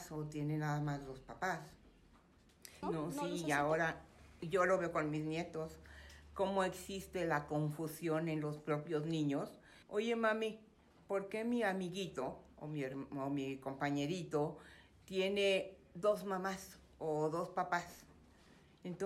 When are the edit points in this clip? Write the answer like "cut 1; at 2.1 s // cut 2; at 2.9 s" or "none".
cut 1; at 2.8 s // cut 2; at 9.8 s